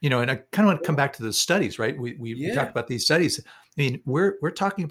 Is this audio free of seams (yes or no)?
yes